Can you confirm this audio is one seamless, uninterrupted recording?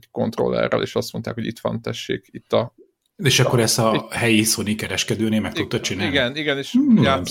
yes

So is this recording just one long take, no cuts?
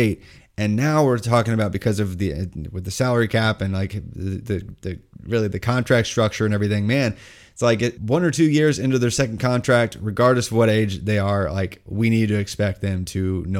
no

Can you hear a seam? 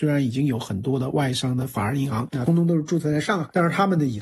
yes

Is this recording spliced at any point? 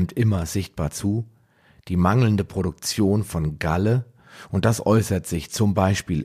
no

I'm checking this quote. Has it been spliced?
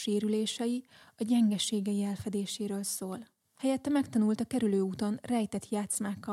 yes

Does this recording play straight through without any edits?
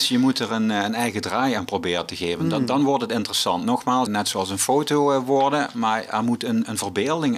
no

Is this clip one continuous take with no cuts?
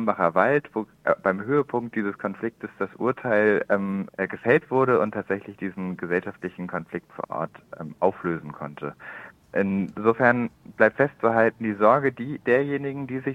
no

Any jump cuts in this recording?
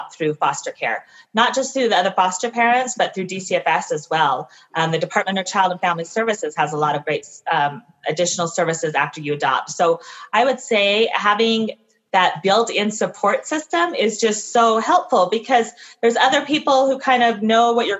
no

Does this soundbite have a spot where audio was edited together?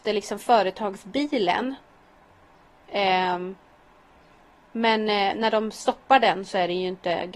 no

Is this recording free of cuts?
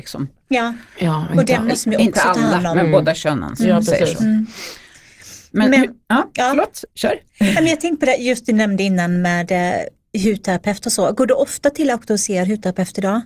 yes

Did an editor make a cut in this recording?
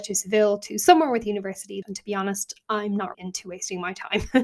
yes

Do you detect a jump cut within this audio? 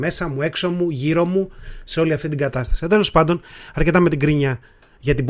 no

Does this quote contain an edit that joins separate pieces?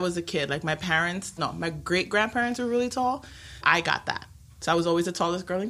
yes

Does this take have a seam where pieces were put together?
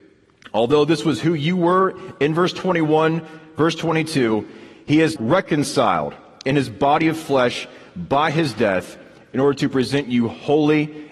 yes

